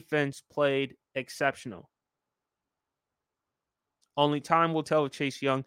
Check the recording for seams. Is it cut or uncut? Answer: cut